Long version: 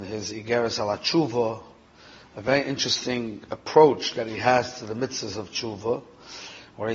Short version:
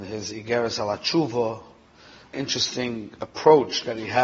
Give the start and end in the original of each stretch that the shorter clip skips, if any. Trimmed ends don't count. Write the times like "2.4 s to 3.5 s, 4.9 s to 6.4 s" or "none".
2.3 s to 2.6 s